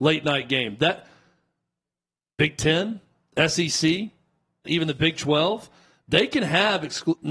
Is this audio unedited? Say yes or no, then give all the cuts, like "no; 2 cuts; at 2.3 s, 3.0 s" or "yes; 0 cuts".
no; 1 cut; at 4.6 s